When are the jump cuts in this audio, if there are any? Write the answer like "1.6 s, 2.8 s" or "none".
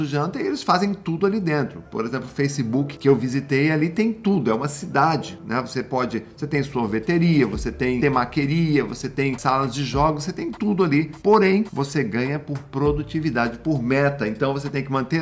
11.2 s